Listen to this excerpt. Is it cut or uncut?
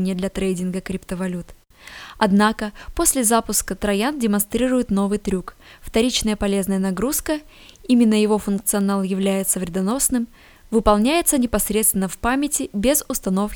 uncut